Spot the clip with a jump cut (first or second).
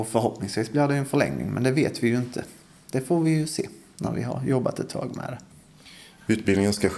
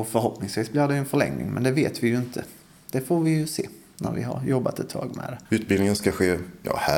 second